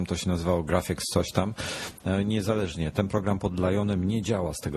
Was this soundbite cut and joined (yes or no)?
no